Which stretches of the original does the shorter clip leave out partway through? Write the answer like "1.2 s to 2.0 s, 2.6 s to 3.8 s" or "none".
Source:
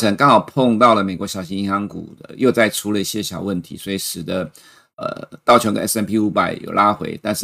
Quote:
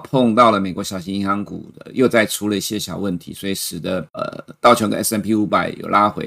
4.5 s to 4.9 s